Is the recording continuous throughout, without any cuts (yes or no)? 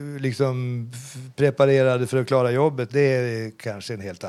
no